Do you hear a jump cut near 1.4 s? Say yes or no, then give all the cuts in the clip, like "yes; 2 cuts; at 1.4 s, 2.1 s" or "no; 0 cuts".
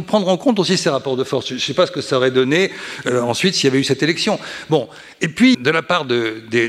no; 1 cut; at 5.5 s